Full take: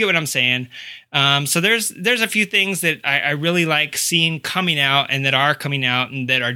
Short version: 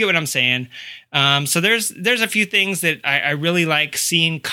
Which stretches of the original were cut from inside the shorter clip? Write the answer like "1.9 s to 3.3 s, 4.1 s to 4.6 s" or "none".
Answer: none